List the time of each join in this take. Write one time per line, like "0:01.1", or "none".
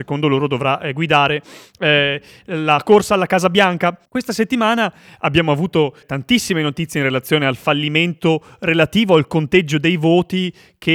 0:04.1
0:06.0